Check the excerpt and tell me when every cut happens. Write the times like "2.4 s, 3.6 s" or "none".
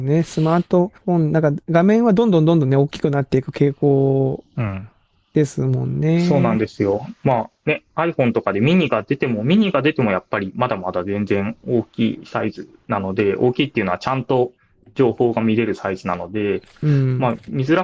none